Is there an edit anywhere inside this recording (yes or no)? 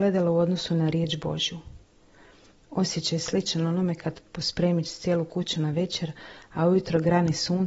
no